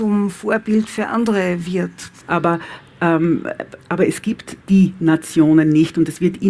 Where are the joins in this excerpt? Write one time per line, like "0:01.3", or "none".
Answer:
0:02.2
0:04.6